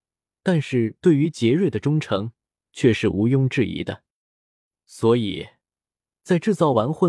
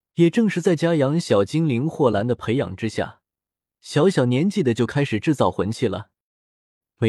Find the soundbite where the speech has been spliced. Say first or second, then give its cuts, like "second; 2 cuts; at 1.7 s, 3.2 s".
second; 1 cut; at 3.8 s